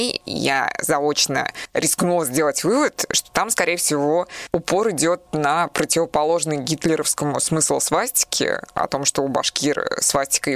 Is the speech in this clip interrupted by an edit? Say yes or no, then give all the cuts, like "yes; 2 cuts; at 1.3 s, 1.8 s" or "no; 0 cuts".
no; 0 cuts